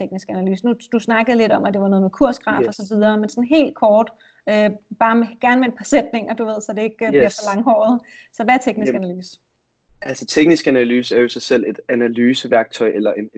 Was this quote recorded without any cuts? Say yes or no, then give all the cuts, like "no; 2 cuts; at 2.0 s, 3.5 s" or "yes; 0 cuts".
yes; 0 cuts